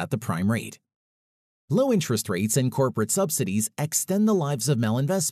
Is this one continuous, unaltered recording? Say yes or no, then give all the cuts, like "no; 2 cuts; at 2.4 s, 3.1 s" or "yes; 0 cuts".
no; 1 cut; at 1.6 s